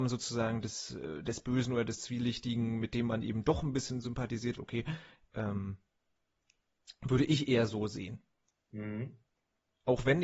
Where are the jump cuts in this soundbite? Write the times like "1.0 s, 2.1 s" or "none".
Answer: 4.6 s